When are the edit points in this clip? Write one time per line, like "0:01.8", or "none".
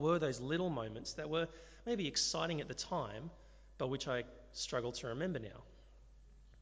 none